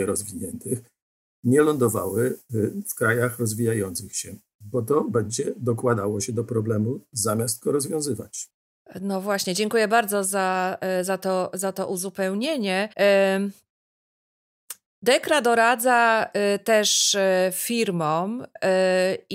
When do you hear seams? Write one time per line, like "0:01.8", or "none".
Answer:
0:12.9